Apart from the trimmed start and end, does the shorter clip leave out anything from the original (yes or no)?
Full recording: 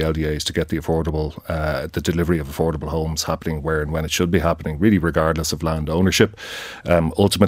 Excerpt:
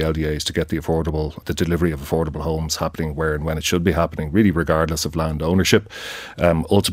yes